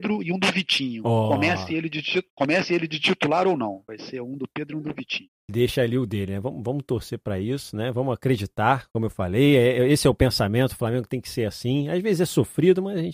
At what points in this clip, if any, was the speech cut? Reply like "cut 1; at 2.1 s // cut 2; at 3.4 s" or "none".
none